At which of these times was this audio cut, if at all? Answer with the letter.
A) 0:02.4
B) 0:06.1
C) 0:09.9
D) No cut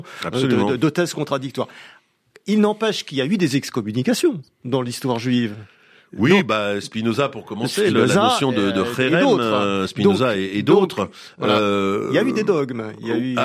D